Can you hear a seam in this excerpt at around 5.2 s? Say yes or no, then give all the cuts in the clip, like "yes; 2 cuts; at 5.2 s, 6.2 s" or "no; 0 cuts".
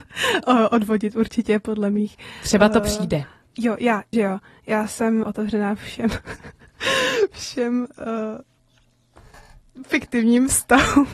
yes; 2 cuts; at 4.1 s, 5.2 s